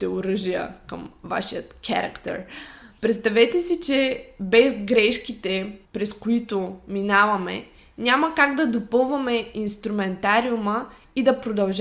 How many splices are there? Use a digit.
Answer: 1